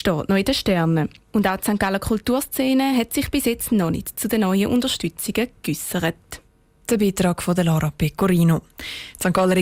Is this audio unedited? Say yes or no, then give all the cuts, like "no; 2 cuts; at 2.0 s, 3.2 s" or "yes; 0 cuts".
yes; 0 cuts